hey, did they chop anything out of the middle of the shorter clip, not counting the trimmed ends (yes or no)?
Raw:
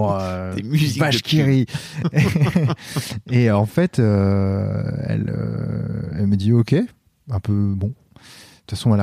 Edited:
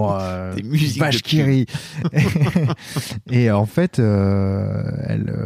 no